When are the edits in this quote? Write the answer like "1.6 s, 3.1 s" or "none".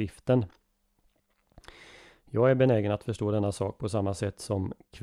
none